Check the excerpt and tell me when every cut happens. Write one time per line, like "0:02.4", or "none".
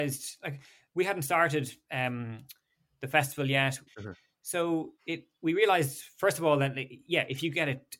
0:03.9
0:05.0